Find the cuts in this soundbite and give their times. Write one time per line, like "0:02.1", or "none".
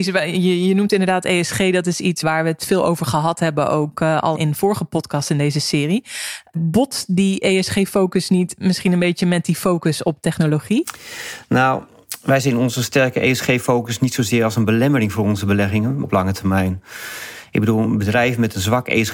0:04.3
0:16.0